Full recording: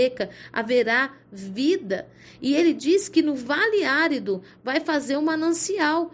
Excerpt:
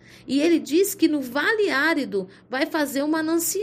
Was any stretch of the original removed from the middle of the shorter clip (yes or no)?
no